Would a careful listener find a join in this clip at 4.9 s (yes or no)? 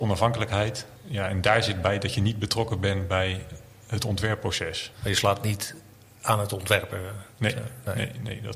yes